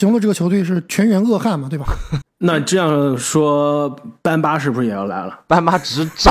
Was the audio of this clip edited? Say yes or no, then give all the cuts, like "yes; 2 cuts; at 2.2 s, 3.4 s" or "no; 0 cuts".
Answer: yes; 1 cut; at 2.2 s